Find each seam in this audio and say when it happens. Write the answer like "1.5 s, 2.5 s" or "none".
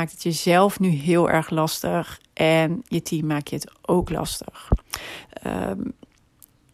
5.3 s